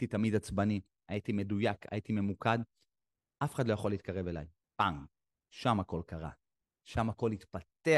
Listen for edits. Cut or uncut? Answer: cut